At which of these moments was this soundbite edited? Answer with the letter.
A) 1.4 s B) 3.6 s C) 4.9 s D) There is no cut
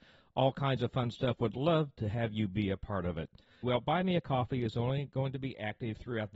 B